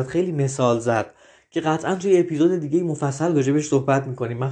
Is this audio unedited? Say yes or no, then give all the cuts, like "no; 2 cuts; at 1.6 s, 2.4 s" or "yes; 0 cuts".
yes; 0 cuts